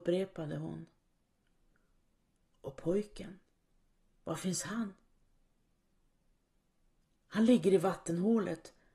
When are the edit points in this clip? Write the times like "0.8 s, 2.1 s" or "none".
none

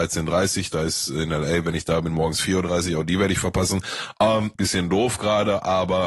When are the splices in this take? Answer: 4.5 s

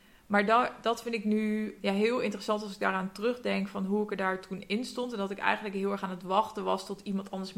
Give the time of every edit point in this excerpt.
1.8 s

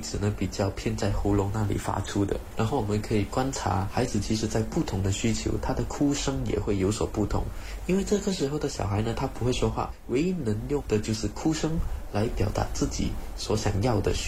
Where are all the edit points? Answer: none

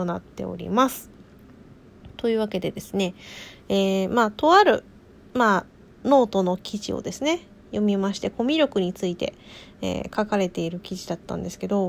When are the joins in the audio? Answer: none

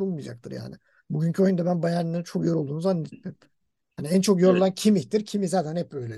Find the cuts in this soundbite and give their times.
none

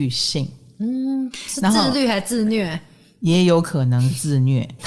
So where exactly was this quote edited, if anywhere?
none

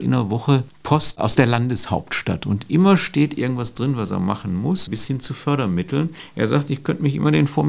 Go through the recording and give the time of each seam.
4.9 s

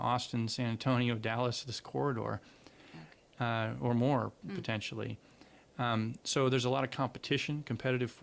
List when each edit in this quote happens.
none

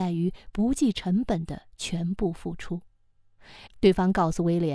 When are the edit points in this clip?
3.7 s

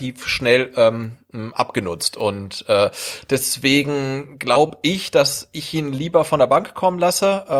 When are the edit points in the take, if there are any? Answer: none

